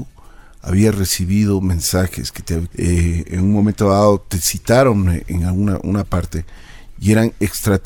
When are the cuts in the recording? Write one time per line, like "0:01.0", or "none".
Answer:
0:02.7